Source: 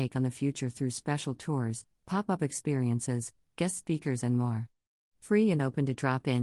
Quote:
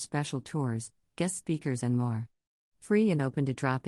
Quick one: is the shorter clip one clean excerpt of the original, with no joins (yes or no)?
no